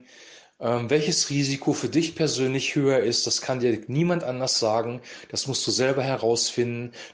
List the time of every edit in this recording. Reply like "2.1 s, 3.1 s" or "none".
none

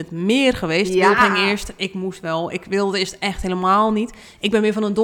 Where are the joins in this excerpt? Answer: none

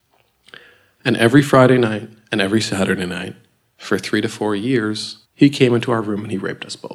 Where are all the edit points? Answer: 5.2 s

